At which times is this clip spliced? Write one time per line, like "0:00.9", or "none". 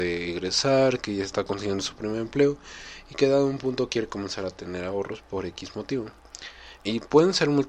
0:06.8

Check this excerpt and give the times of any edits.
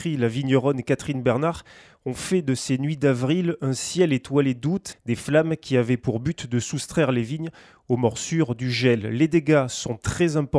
0:04.9

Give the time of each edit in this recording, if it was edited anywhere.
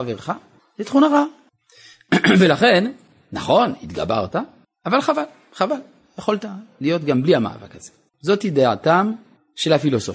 0:08.1

